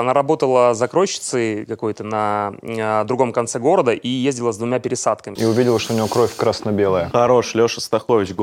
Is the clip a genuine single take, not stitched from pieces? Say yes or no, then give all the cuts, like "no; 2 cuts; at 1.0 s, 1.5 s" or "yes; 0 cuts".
no; 2 cuts; at 5.4 s, 7.1 s